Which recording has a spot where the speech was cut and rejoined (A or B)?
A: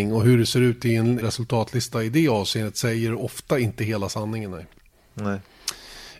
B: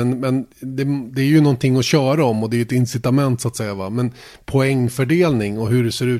A